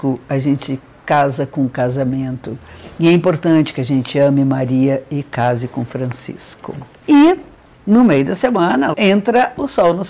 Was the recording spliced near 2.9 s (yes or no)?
no